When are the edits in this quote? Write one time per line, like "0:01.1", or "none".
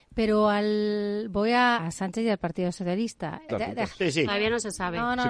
0:01.8
0:03.5